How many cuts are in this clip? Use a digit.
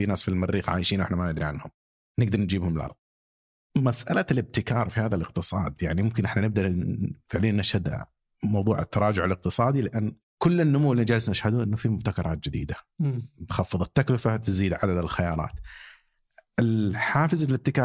0